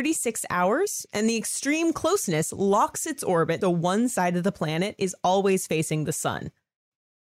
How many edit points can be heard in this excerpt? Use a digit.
1